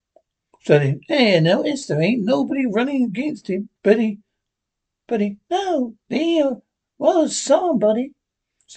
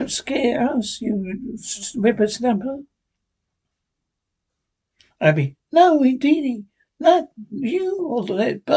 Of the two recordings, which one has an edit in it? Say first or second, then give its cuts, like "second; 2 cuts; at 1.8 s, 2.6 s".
first; 2 cuts; at 3.8 s, 6.0 s